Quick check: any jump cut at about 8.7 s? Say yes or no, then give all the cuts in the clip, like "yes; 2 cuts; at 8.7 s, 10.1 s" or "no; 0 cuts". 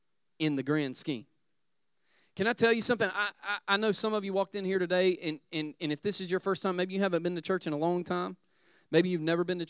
no; 0 cuts